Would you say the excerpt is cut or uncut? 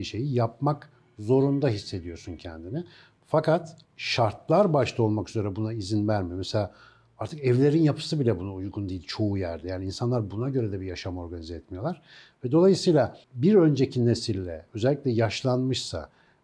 uncut